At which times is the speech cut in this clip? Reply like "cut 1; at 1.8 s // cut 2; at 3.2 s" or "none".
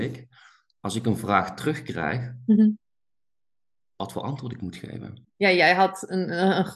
cut 1; at 5.2 s